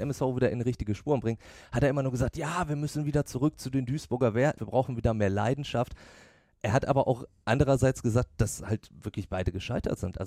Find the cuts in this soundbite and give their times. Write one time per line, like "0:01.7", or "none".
0:04.6